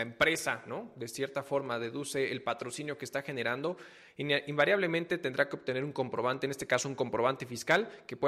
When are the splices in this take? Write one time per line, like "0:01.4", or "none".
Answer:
none